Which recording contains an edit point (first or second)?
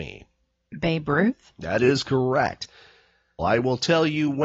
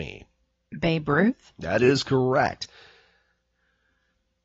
first